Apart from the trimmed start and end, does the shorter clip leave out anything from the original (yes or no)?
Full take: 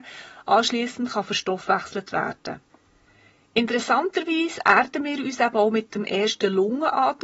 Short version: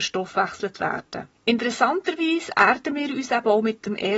yes